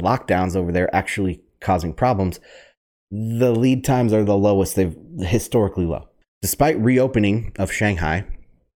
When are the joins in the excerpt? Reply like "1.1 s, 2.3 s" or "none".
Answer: 6.2 s